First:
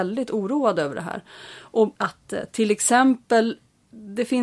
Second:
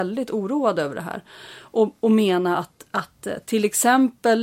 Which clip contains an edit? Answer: first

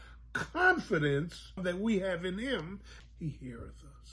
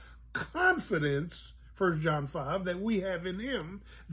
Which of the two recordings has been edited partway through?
first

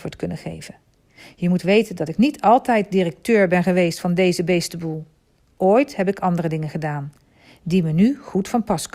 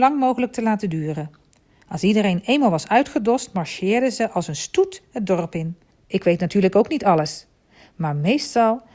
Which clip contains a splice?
second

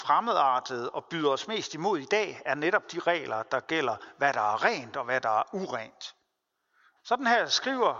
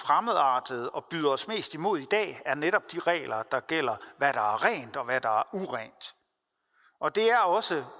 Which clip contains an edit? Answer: first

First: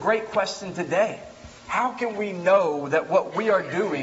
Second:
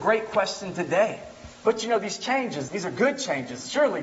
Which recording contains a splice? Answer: second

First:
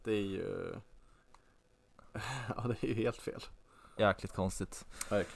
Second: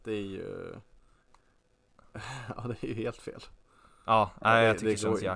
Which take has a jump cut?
first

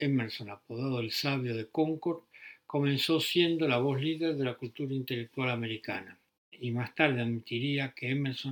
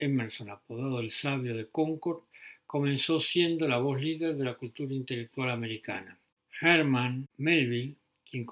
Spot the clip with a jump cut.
first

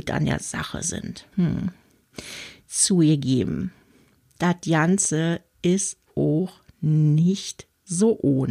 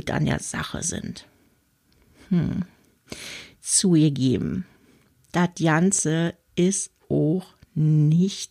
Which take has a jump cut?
first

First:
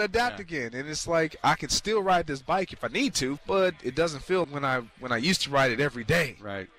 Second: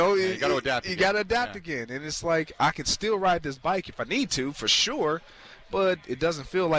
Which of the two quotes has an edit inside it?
first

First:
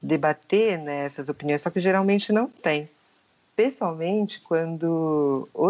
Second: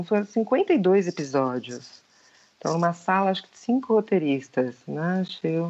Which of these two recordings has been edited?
first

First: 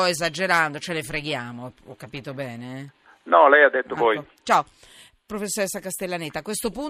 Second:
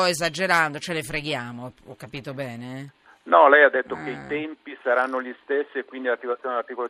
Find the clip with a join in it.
first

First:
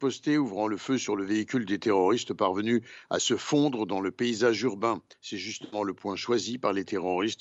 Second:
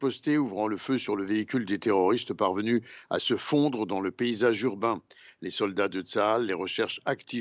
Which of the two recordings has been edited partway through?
first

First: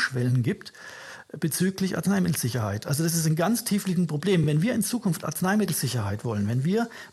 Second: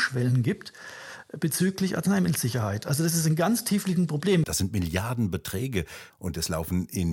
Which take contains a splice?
second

